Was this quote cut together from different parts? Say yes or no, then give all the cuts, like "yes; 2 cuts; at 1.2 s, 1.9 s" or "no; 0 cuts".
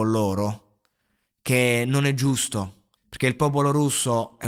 yes; 1 cut; at 3.0 s